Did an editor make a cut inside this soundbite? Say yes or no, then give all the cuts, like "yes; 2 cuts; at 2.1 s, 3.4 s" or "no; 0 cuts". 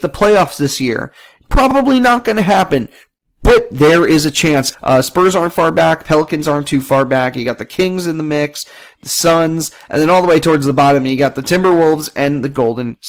yes; 1 cut; at 4.7 s